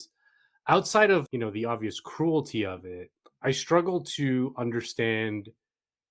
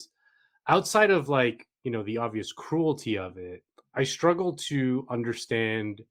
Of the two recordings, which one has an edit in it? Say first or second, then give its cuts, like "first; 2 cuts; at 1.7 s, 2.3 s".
first; 1 cut; at 1.3 s